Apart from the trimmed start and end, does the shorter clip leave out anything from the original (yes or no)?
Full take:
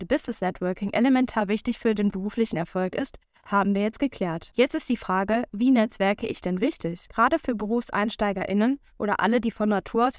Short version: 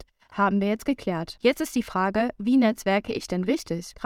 no